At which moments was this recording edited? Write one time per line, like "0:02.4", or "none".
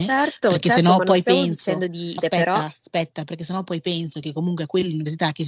0:02.2